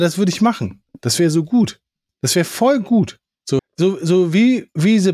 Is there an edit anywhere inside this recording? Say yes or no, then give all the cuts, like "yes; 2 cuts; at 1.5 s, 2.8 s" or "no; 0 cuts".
yes; 1 cut; at 3.6 s